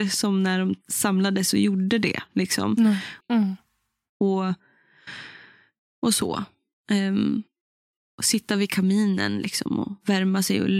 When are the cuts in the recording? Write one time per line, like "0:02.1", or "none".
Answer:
0:03.2

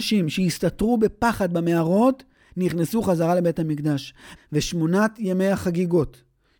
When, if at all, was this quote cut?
0:04.4

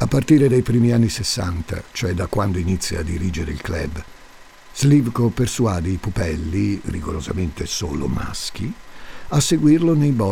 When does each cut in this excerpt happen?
none

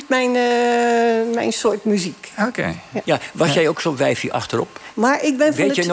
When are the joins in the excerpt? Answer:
0:03.0
0:04.9

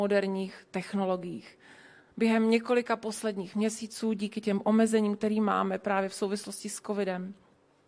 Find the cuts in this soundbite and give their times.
none

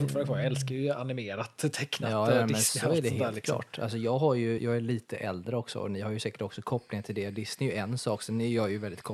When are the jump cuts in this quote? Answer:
0:04.6

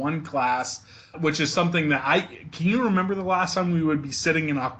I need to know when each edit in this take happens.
0:01.1

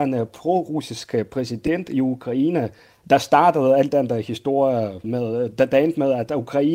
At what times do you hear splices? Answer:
0:05.0

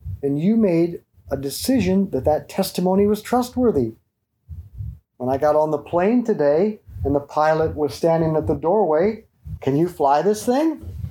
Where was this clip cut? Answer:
0:05.1
0:09.6

